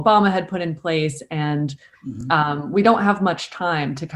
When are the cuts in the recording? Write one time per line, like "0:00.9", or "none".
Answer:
none